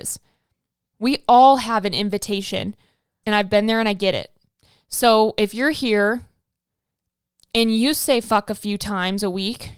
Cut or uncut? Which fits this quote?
cut